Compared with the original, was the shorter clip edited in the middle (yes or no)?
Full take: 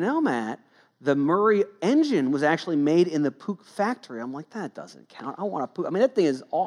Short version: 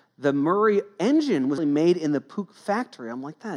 yes